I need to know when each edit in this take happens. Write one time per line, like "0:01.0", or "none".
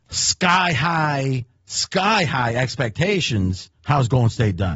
0:03.8

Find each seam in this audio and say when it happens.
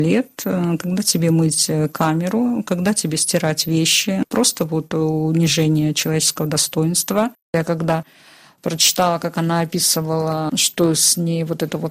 none

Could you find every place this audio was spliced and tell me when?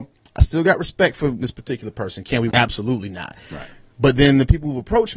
0:02.5

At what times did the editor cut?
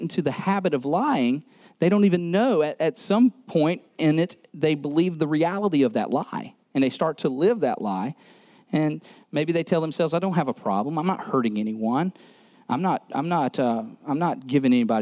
none

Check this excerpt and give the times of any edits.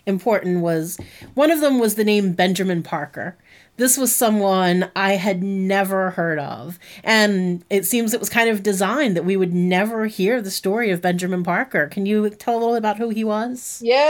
none

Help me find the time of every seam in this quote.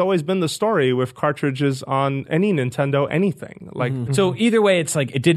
0:04.1

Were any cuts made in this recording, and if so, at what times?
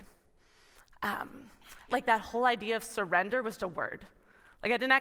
0:01.9
0:03.6

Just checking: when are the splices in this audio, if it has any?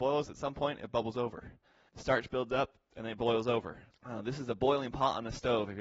0:01.9
0:03.9

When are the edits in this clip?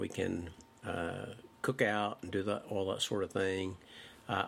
0:01.5

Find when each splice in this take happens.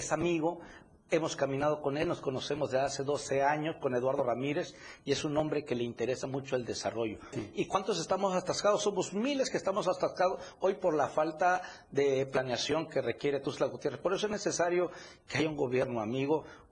0:07.3

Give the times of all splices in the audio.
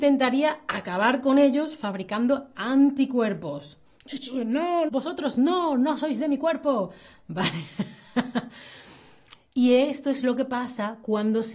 0:04.9

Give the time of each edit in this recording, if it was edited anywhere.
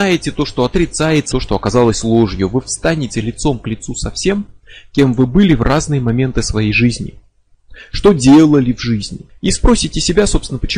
0:01.3

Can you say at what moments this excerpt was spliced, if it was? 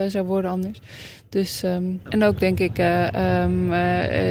none

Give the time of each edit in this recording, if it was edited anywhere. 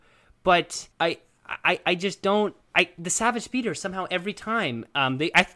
0:00.9
0:02.6

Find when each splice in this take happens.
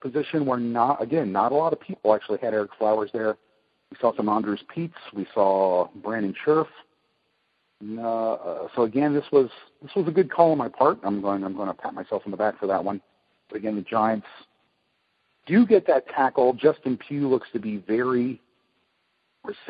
none

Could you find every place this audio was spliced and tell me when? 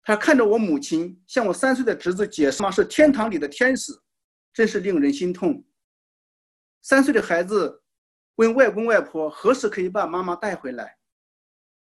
0:02.6

